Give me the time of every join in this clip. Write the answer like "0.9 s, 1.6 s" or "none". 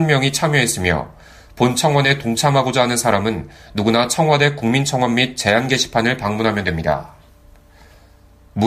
none